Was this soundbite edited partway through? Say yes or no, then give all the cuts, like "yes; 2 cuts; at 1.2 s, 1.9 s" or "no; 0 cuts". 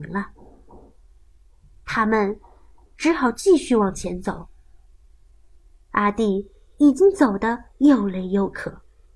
no; 0 cuts